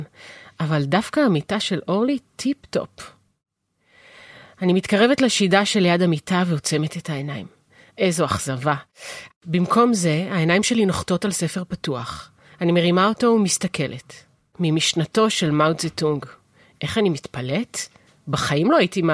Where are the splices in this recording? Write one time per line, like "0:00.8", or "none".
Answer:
0:07.9
0:09.3